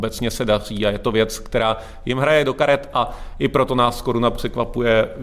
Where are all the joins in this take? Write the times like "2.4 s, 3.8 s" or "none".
none